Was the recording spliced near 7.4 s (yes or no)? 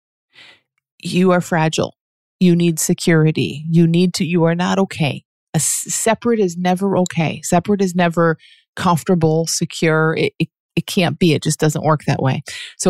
no